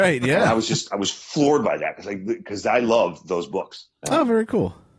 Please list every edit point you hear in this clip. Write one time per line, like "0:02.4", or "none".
0:04.0